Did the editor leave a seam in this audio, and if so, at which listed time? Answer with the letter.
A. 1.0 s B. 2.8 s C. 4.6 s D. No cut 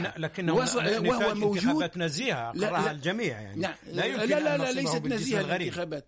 D